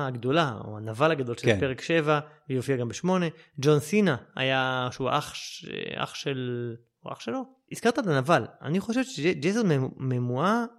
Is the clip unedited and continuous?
no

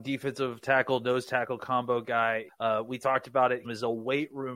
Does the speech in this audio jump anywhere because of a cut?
yes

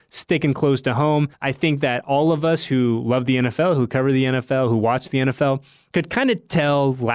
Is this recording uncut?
no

